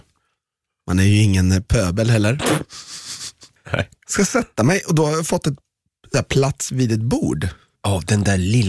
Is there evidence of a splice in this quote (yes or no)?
yes